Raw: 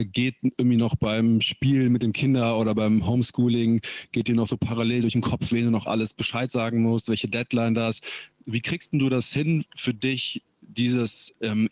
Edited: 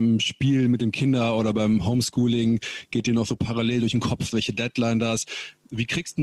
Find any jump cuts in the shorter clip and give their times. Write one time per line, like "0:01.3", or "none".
0:04.3